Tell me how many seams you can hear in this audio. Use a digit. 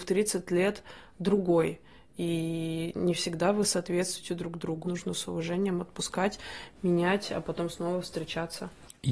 1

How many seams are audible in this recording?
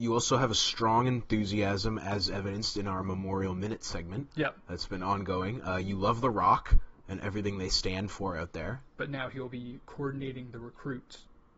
1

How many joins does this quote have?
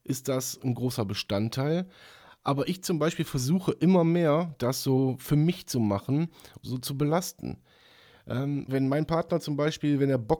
2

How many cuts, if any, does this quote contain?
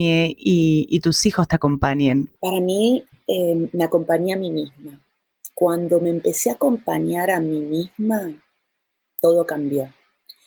1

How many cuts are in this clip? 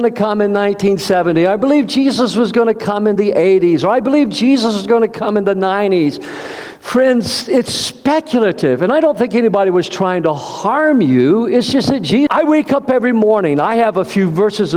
1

